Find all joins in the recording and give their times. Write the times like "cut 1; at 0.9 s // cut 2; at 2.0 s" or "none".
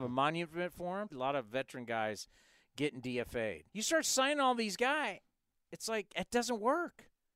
cut 1; at 1.1 s // cut 2; at 3.7 s